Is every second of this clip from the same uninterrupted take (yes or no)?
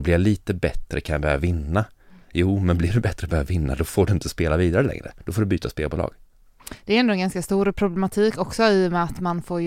yes